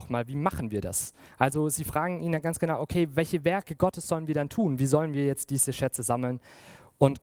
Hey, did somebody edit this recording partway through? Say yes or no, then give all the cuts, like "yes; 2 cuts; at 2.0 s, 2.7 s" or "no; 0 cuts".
no; 0 cuts